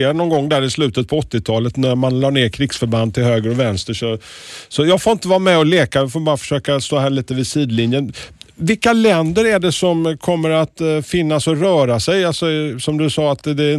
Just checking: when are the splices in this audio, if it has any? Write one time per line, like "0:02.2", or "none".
none